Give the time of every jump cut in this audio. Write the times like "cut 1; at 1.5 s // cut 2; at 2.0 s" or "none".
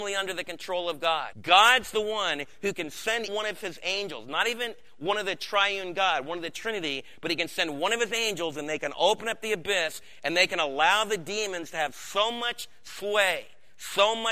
cut 1; at 1.3 s // cut 2; at 3.3 s